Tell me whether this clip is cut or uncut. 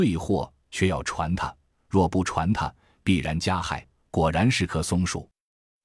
cut